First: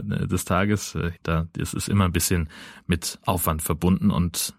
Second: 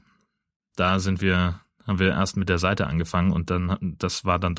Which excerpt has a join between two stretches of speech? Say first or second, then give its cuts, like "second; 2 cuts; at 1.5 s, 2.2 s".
first; 1 cut; at 1.2 s